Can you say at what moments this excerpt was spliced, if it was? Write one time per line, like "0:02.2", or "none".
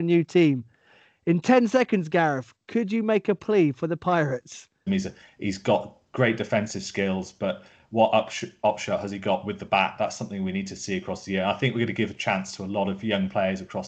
0:04.9